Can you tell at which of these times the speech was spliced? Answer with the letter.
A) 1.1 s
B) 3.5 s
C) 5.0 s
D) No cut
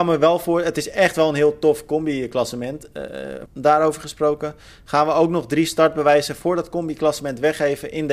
B